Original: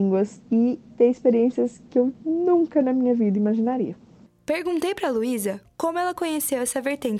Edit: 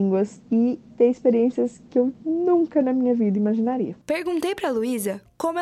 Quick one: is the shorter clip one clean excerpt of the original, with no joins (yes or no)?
no